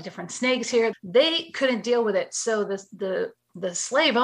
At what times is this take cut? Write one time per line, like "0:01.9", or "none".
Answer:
0:00.9